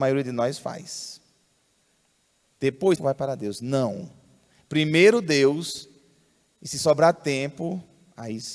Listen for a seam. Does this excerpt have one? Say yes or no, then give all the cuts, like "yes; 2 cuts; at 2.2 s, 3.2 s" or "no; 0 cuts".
yes; 1 cut; at 3.0 s